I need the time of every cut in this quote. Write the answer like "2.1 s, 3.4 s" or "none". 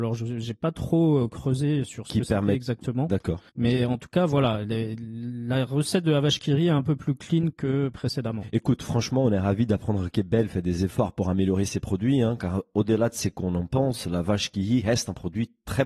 3.5 s